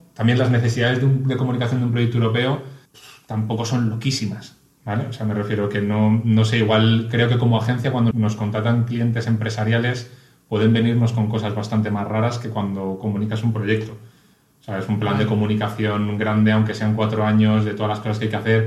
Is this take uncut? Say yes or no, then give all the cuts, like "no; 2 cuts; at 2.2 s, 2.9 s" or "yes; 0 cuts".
no; 2 cuts; at 2.9 s, 8.1 s